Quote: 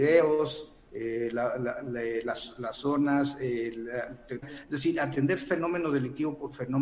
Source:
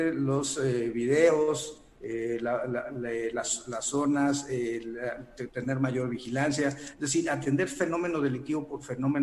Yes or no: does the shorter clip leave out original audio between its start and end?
yes